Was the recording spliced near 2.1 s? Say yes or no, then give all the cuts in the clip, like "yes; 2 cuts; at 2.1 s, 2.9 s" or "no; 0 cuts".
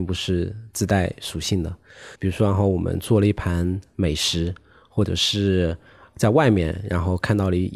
yes; 1 cut; at 2.1 s